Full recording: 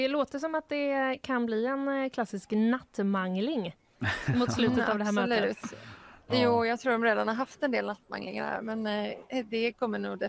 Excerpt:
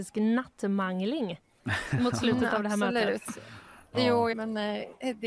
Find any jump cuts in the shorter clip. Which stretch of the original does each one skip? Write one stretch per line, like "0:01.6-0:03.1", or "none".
0:06.7-0:08.6